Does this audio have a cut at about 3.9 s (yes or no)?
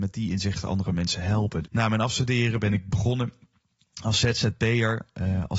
no